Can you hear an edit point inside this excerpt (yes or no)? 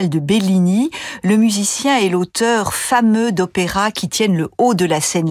no